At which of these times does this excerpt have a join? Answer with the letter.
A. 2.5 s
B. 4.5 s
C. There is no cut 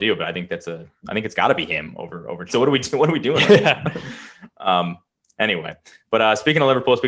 A